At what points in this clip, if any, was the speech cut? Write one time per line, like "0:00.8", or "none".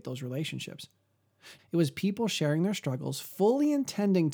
0:01.6